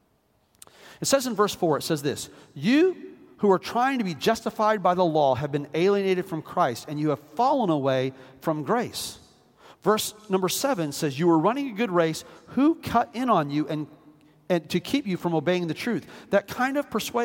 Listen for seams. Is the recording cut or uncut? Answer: uncut